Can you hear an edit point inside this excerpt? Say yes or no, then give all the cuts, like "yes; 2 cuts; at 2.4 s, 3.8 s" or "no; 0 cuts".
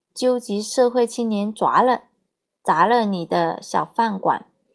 no; 0 cuts